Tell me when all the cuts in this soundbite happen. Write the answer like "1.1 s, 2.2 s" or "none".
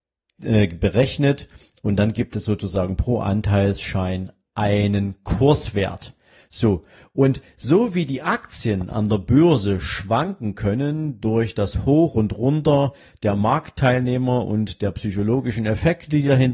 none